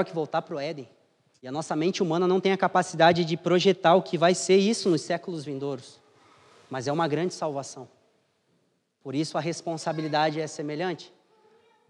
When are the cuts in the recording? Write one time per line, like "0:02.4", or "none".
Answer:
0:01.4